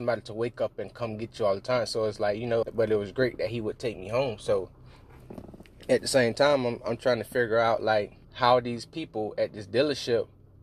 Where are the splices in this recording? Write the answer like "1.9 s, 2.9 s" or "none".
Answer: 2.6 s, 8.2 s